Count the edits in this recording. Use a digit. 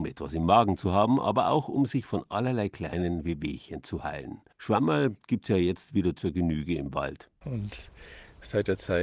2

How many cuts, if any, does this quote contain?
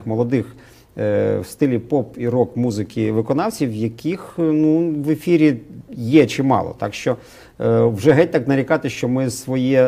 0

